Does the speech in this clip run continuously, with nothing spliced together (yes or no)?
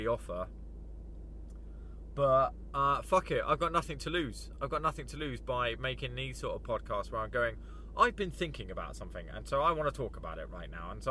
yes